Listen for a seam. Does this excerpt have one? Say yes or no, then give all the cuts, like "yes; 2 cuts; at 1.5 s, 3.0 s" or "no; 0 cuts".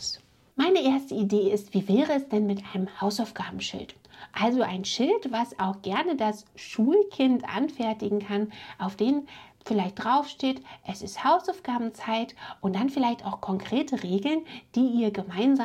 no; 0 cuts